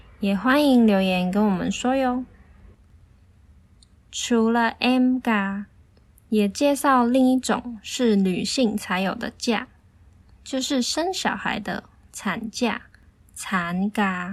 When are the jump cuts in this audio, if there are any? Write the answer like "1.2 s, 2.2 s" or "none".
none